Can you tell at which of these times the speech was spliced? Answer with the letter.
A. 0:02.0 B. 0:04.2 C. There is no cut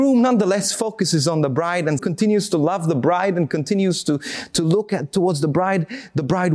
A